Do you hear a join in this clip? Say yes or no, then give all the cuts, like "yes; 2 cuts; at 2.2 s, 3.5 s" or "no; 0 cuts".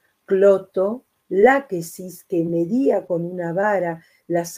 yes; 1 cut; at 1.2 s